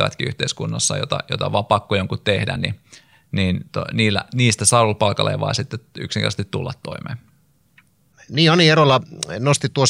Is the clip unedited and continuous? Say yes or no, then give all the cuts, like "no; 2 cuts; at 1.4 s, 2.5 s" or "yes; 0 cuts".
yes; 0 cuts